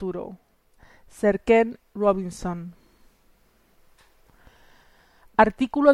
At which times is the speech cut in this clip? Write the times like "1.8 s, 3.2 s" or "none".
none